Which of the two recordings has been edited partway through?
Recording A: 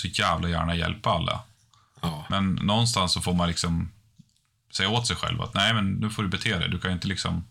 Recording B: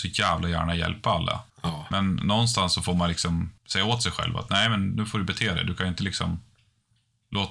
B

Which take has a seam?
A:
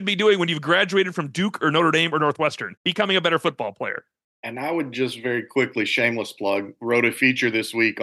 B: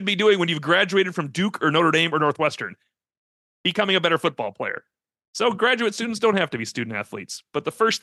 A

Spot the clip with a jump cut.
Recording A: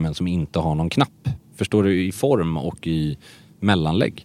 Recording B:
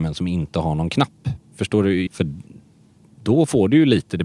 B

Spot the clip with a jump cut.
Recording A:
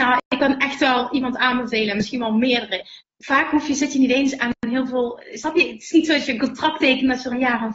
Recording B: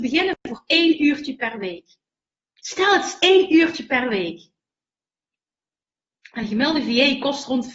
A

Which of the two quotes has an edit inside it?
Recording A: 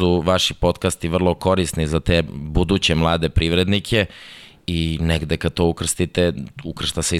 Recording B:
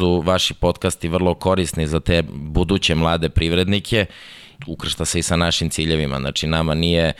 B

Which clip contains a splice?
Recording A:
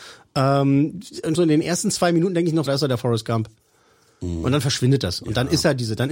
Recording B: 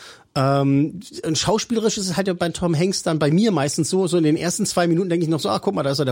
A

